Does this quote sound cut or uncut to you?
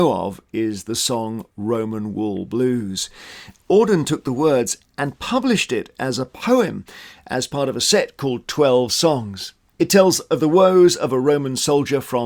uncut